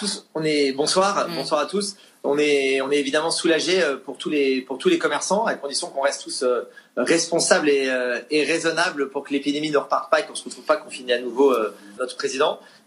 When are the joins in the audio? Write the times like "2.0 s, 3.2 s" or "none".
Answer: 12.0 s